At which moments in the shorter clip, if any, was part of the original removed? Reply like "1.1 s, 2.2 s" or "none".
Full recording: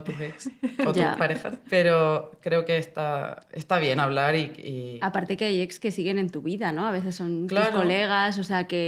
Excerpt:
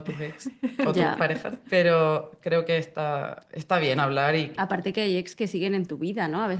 4.6 s